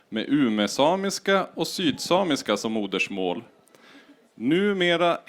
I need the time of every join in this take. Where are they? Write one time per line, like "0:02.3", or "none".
none